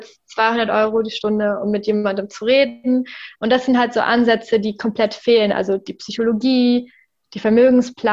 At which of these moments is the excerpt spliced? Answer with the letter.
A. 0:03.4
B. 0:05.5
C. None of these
A